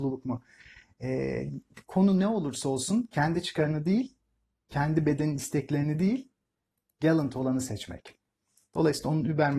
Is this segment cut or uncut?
uncut